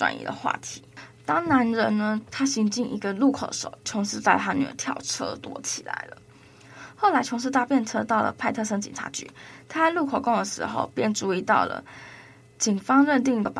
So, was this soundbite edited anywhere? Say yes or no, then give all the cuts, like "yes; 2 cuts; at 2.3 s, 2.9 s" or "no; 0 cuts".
no; 0 cuts